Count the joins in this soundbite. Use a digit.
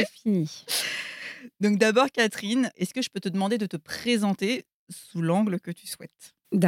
0